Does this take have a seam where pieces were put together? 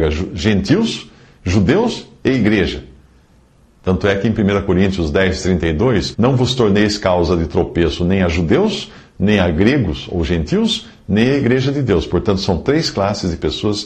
yes; 1 cut; at 6.1 s

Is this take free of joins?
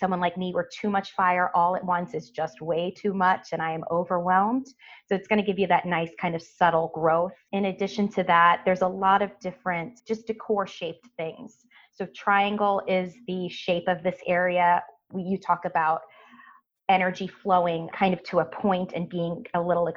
yes; 0 cuts

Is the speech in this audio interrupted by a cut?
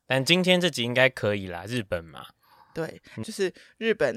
yes; 1 cut; at 3.2 s

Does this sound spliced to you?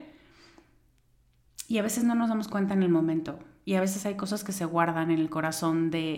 no; 0 cuts

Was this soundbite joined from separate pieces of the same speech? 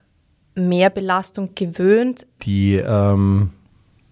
yes; 1 cut; at 2.4 s

